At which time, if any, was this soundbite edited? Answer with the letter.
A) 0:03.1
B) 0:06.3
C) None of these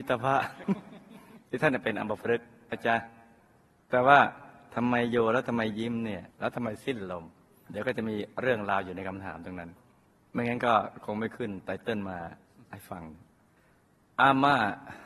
B